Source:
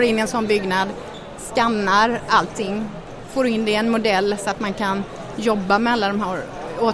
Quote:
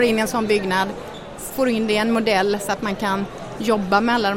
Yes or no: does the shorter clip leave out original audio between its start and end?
yes